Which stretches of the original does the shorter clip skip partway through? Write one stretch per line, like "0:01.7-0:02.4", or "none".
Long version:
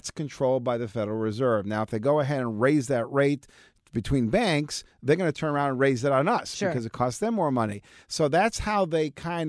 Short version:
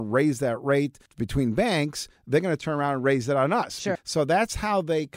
0:03.5-0:03.8
0:06.7-0:08.0